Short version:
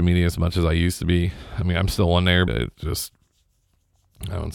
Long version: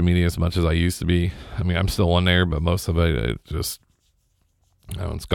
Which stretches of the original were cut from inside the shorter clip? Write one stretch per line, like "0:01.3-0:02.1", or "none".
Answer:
0:02.5-0:03.2